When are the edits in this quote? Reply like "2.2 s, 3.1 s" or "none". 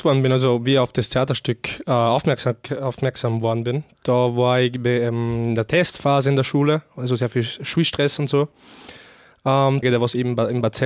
9.8 s